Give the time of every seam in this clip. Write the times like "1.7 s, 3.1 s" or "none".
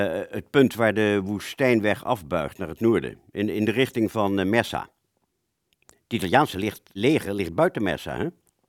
7.0 s